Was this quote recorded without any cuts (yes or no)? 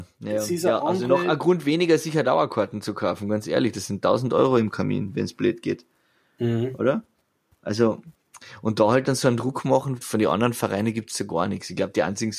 yes